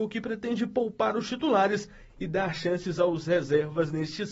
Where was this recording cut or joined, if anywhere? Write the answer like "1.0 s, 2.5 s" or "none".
none